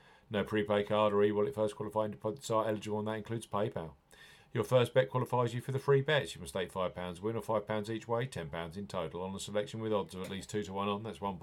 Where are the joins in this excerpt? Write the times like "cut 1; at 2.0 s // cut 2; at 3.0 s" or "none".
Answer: cut 1; at 4.4 s